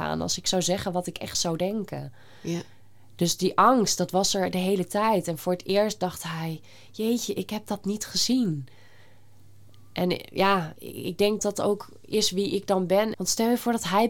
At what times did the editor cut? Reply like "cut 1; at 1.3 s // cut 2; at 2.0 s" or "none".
cut 1; at 11.4 s // cut 2; at 13.1 s